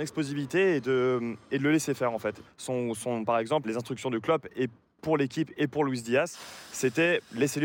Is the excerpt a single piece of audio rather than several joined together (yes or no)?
no